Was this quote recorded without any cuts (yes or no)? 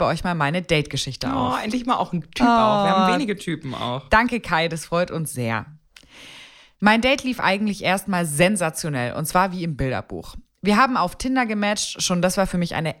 yes